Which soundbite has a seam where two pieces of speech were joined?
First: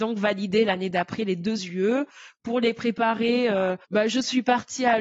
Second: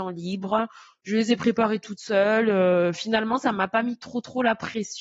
first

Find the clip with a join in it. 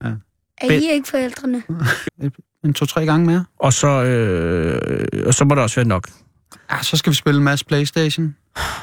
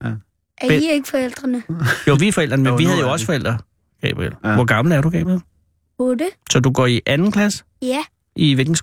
first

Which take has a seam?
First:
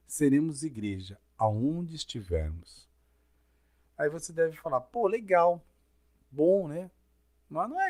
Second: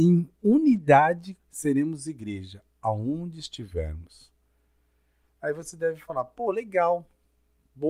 second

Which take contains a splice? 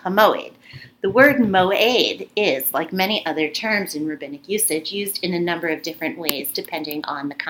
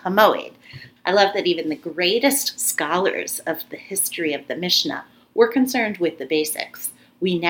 second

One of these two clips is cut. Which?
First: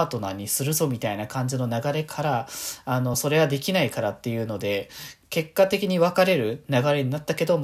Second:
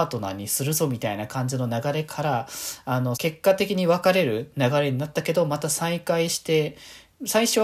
second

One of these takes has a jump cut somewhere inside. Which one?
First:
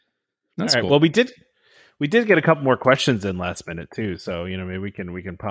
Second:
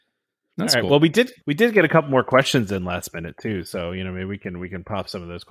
second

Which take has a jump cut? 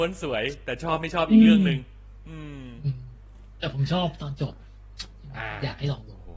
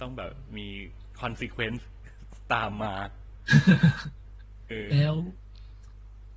second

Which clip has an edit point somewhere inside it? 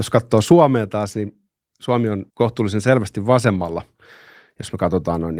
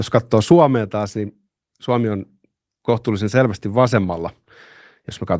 first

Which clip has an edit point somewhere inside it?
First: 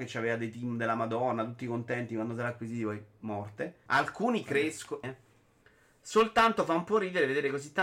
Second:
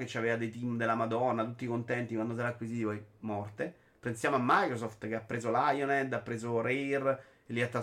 first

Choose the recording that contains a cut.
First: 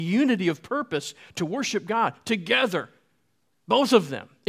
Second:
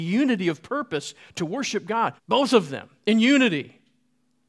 second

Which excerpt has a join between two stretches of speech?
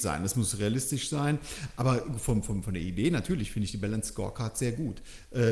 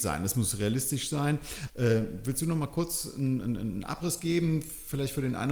second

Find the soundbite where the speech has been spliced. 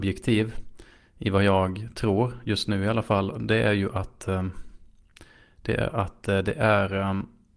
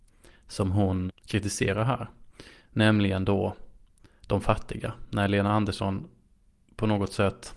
second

